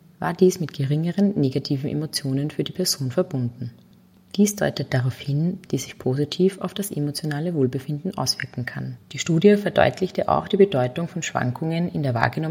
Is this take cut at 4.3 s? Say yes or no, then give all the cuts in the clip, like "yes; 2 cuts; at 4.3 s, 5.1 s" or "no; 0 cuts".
no; 2 cuts; at 5.6 s, 9.0 s